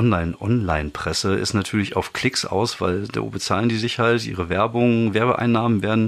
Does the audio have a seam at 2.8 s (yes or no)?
no